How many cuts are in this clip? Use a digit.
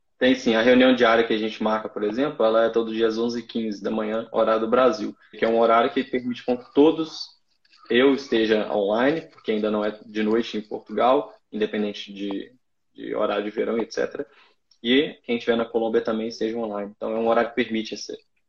1